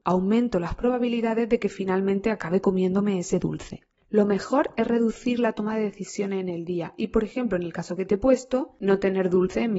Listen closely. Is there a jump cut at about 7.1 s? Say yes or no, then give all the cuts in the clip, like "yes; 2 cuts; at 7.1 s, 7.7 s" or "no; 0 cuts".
no; 0 cuts